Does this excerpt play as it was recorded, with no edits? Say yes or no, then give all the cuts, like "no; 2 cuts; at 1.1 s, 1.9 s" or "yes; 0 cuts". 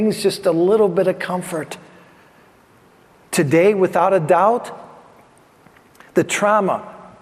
yes; 0 cuts